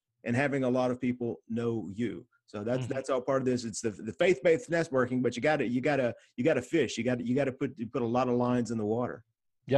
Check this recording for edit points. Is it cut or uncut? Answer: uncut